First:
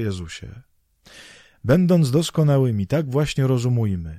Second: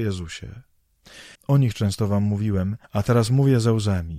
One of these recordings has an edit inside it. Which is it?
second; 2 cuts; at 1.4 s, 2.8 s

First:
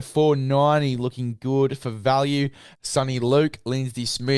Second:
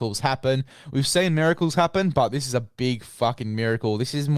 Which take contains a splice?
first; 1 cut; at 2.7 s

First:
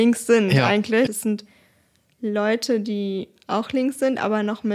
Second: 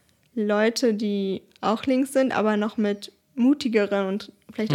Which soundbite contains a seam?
first; 1 cut; at 1.1 s

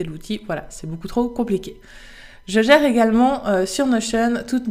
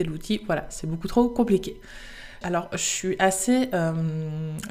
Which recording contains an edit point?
second; 1 cut; at 2.4 s

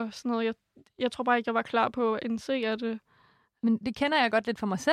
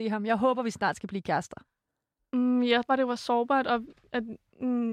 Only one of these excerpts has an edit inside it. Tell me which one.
second; 1 cut; at 2.9 s

